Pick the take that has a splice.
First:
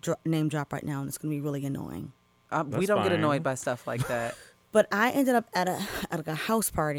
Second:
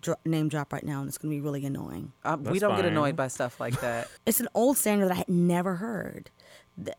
second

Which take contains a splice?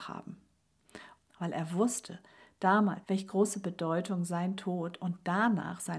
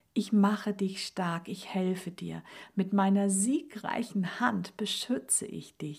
first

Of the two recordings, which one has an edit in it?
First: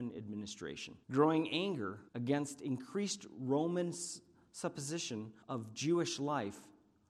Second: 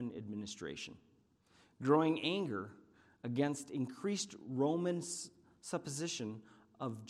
first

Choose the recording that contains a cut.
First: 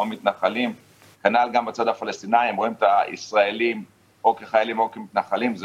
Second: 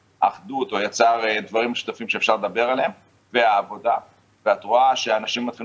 first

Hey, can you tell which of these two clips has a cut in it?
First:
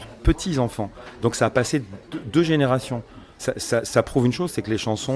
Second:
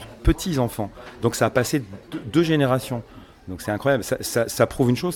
first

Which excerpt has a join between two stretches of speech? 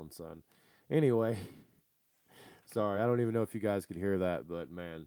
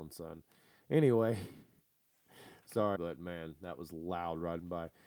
second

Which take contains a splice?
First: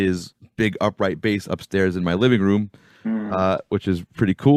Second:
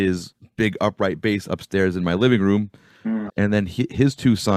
second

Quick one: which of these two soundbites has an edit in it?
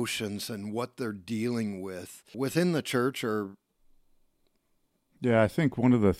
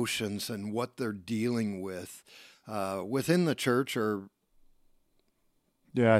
first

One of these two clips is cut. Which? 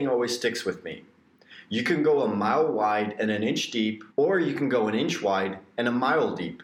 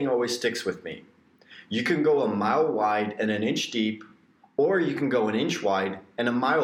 first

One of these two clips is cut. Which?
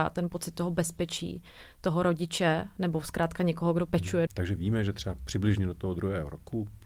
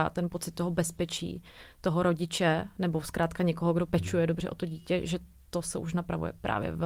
first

